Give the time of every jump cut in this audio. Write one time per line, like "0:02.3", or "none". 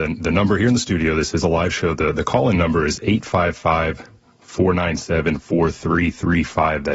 none